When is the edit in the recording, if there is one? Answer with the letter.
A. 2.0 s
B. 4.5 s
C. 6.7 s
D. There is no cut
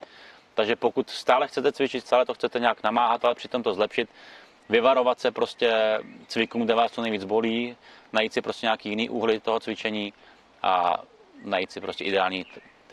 D